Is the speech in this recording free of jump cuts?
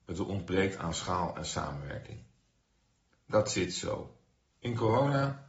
no; 1 cut; at 4.5 s

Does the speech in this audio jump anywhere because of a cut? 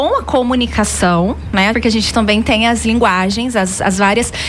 yes; 1 cut; at 1.7 s

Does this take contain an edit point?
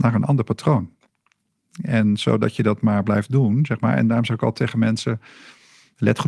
no; 0 cuts

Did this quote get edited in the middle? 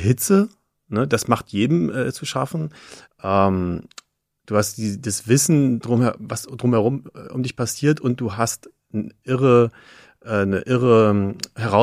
yes; 1 cut; at 3.1 s

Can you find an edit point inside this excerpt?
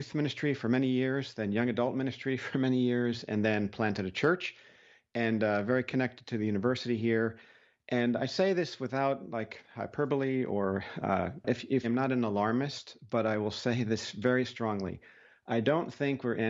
yes; 1 cut; at 11.8 s

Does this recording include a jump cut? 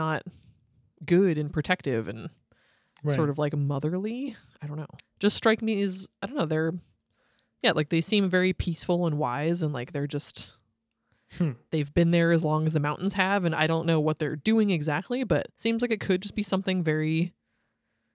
yes; 2 cuts; at 5.0 s, 15.5 s

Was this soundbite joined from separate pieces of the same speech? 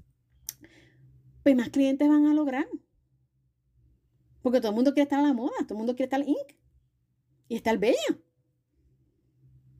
no; 0 cuts

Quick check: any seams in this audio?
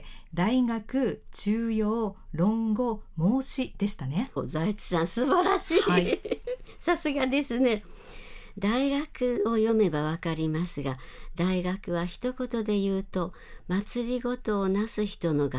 yes; 1 cut; at 4.4 s

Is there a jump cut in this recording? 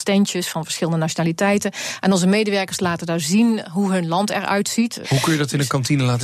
yes; 1 cut; at 5.0 s

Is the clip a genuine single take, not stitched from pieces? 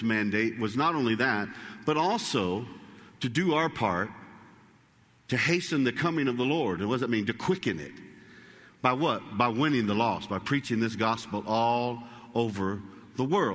yes; 0 cuts

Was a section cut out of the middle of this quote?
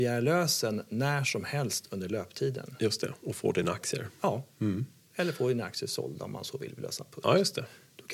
no; 0 cuts

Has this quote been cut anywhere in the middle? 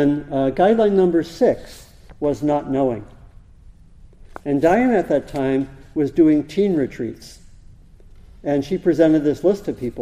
no; 0 cuts

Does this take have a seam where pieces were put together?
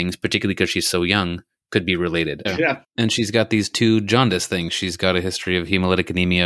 yes; 1 cut; at 2.4 s

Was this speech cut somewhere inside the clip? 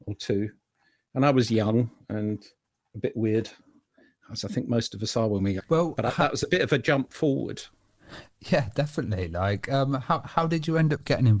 yes; 1 cut; at 5.6 s

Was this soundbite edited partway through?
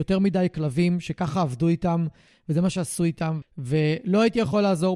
yes; 1 cut; at 3.4 s

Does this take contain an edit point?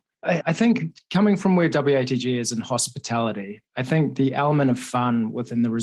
no; 0 cuts

